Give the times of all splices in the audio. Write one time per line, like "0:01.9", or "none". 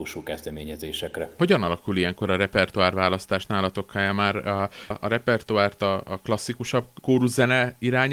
0:04.9